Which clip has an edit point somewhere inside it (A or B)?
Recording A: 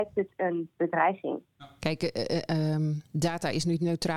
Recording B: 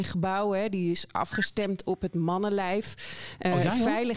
A